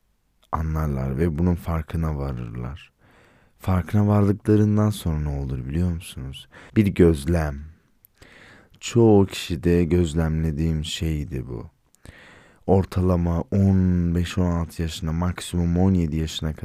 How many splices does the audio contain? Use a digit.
1